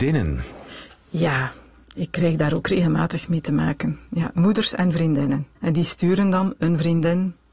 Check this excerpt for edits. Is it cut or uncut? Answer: cut